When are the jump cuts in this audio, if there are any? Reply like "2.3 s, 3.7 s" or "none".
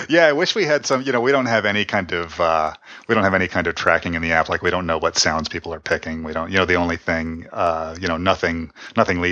none